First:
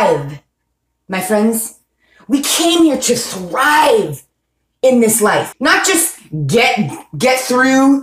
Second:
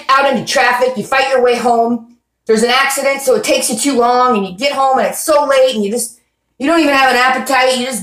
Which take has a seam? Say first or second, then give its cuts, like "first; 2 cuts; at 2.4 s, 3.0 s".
first; 1 cut; at 5.5 s